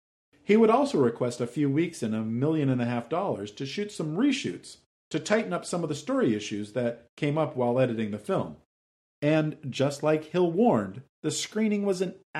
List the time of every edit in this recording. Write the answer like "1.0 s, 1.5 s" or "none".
9.0 s, 11.1 s

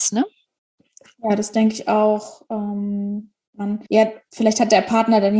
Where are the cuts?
3.9 s

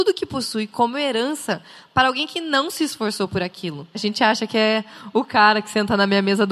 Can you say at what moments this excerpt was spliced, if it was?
3.9 s

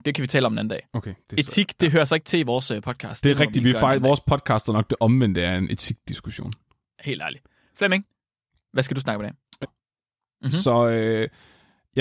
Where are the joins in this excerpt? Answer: 9.6 s

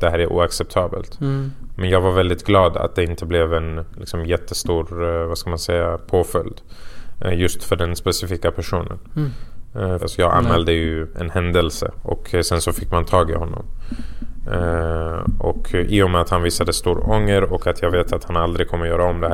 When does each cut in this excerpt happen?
10.0 s, 12.0 s

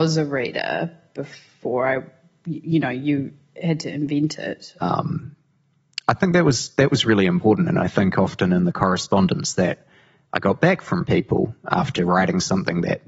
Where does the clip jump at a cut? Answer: 4.8 s

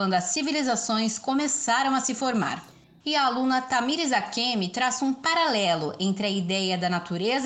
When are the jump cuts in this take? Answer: 3.0 s

